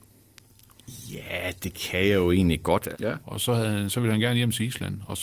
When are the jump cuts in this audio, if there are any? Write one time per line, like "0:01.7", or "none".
0:02.9